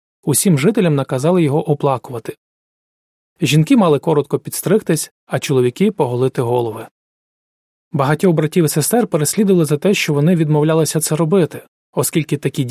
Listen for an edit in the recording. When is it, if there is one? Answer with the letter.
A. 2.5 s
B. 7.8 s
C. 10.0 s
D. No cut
D